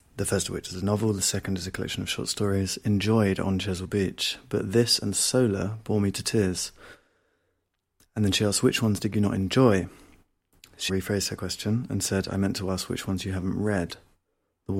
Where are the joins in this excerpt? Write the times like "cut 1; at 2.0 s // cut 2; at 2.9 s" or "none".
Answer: cut 1; at 10.9 s